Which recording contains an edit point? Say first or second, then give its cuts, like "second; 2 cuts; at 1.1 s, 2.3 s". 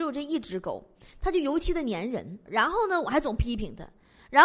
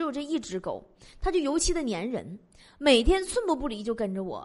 first; 1 cut; at 2.5 s